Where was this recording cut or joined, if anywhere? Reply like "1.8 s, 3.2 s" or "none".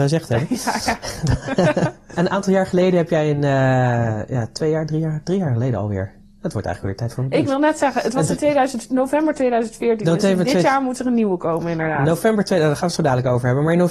none